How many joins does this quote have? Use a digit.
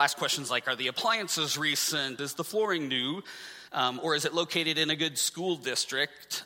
2